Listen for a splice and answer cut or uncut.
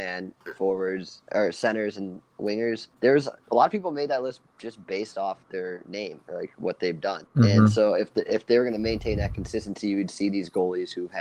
uncut